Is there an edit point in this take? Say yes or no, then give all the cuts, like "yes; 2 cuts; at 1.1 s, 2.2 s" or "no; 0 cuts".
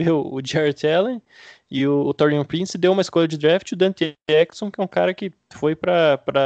no; 0 cuts